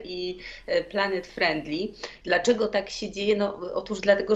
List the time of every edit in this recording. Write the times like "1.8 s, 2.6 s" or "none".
2.2 s